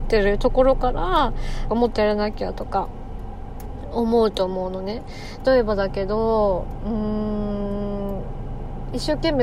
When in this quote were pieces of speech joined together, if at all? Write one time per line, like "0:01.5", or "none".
0:01.7
0:05.4